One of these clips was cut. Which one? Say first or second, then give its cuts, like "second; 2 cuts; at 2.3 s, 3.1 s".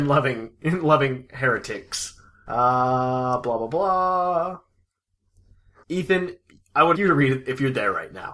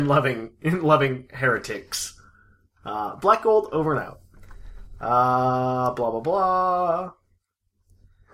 first; 3 cuts; at 2.5 s, 5.8 s, 6.9 s